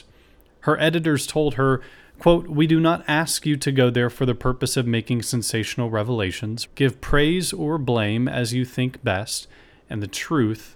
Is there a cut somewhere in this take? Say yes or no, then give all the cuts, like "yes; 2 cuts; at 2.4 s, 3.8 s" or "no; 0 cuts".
yes; 1 cut; at 6.6 s